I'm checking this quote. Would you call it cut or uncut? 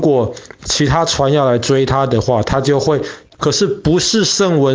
cut